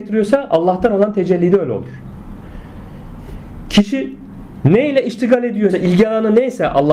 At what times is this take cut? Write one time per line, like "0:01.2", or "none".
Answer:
0:05.7